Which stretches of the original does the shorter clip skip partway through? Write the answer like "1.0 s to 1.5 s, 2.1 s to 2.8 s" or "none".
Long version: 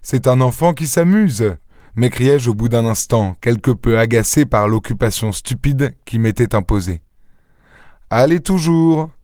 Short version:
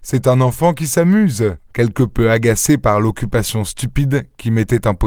1.7 s to 3.4 s